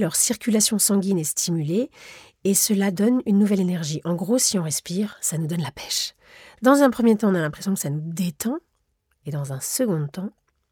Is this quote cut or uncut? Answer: uncut